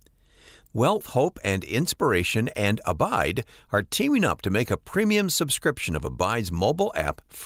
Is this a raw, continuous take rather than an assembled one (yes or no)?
no